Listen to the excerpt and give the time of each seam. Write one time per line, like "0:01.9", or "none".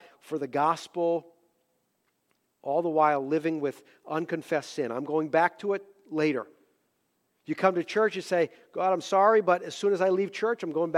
none